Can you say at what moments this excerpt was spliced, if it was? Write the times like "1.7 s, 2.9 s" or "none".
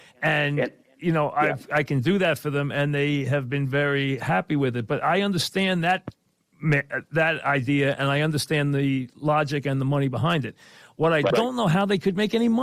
11.3 s